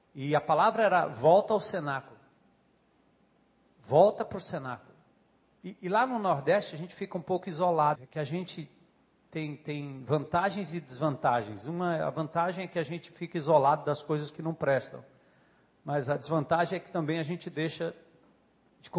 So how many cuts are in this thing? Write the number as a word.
one